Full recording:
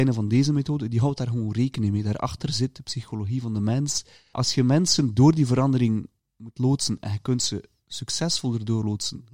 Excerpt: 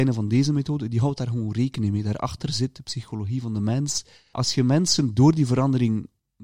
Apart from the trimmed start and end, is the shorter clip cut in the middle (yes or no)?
no